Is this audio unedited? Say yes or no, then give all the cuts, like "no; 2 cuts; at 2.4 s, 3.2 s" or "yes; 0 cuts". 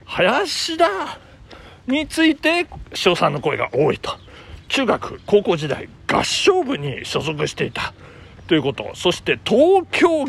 no; 1 cut; at 4.7 s